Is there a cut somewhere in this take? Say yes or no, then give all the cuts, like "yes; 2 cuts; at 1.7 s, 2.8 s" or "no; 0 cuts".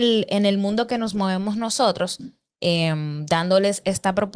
no; 0 cuts